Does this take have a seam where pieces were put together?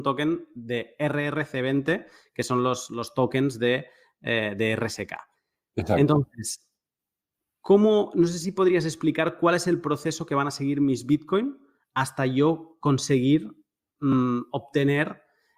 no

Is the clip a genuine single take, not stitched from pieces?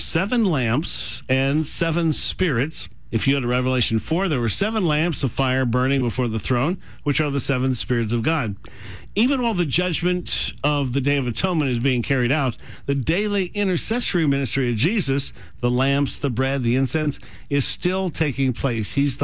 yes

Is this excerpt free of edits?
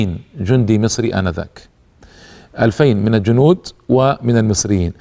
yes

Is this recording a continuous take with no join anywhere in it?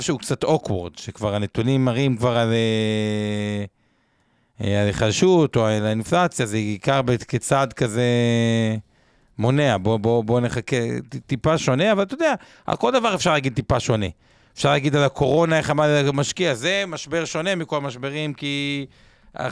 yes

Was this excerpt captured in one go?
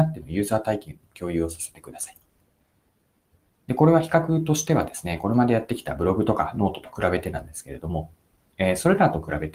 yes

